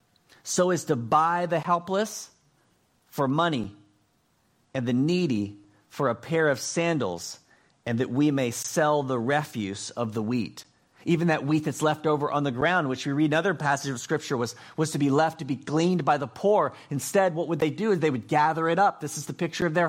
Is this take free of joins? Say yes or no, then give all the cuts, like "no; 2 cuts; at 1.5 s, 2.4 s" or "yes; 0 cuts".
yes; 0 cuts